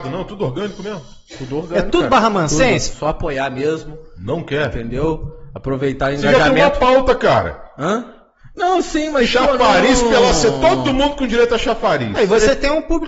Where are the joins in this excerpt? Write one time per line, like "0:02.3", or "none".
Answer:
0:02.9